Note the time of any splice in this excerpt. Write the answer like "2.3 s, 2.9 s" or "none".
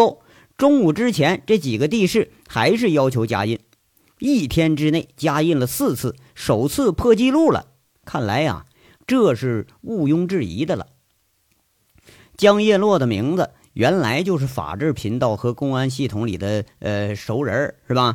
9.0 s